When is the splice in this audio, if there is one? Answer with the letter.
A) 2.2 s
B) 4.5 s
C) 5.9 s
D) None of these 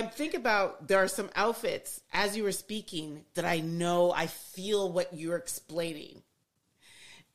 D